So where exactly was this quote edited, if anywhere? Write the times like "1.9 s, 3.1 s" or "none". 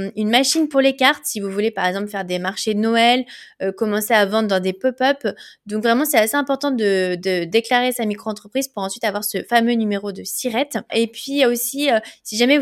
10.9 s